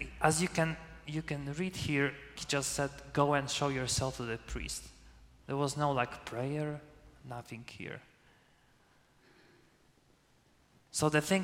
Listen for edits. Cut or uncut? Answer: cut